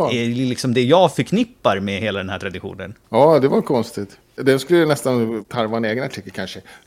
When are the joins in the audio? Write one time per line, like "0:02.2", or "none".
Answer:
0:03.0